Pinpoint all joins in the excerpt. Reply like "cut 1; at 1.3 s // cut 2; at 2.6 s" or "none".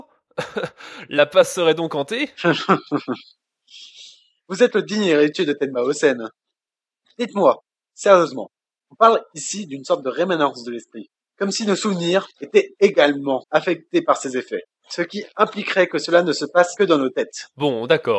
none

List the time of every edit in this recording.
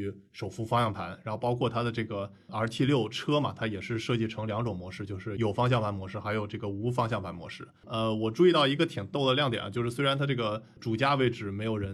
none

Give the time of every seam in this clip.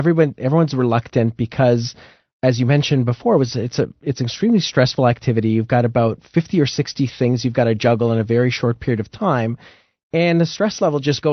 none

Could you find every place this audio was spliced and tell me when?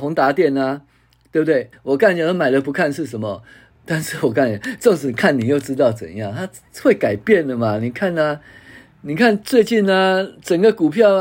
cut 1; at 1.7 s // cut 2; at 3.7 s

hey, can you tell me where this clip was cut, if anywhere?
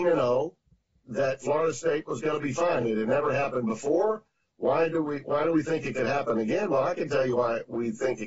none

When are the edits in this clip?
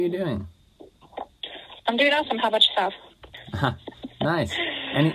cut 1; at 3.3 s

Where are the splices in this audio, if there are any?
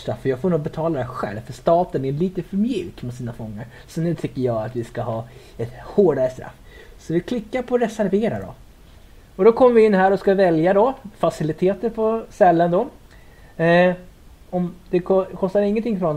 none

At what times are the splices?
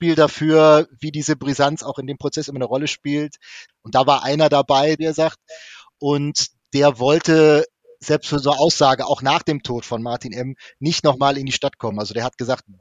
cut 1; at 3.7 s // cut 2; at 5.0 s

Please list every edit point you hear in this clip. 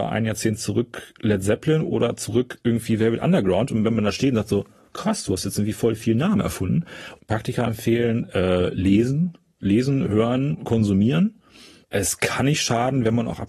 cut 1; at 7.2 s

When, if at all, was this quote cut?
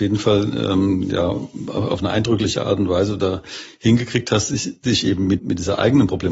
cut 1; at 5.4 s

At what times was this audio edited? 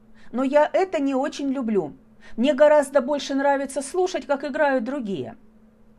none

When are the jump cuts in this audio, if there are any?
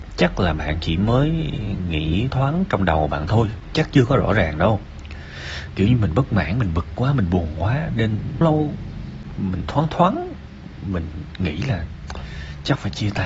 cut 1; at 2.3 s // cut 2; at 8.4 s

